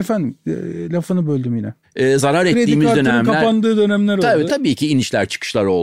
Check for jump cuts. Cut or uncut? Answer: cut